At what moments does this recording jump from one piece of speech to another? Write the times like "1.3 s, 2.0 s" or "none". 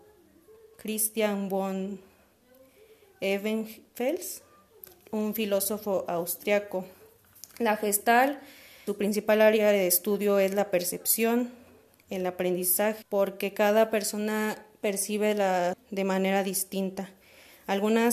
8.9 s, 13.0 s, 15.7 s